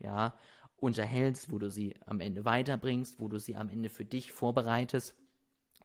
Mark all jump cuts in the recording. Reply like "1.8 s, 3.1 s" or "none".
none